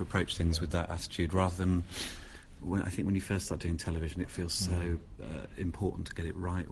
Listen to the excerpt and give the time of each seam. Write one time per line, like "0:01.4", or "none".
none